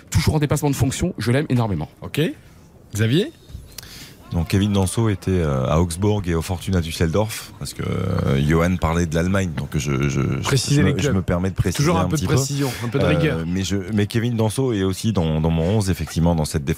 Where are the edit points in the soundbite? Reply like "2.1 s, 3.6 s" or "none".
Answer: 1.9 s